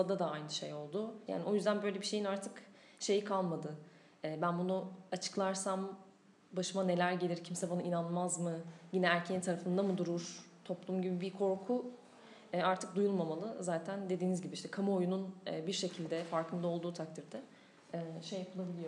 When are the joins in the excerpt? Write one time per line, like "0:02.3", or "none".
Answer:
0:01.3